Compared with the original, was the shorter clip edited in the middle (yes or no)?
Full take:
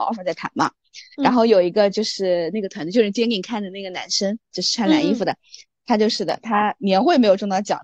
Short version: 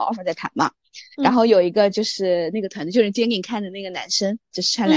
no